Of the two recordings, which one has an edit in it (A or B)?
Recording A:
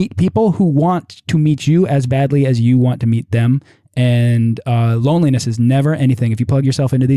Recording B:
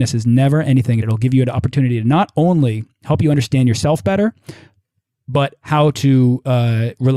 B